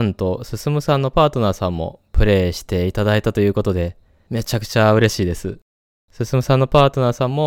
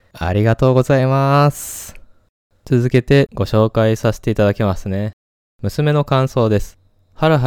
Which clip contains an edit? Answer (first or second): second